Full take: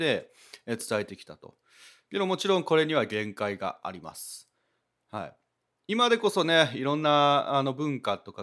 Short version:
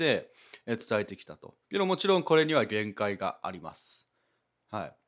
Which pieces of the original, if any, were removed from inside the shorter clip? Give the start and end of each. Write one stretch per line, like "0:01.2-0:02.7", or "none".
0:01.6-0:02.0